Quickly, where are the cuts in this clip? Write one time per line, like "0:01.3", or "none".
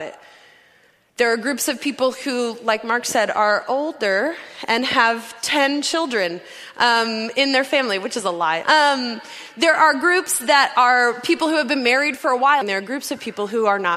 0:08.6
0:12.6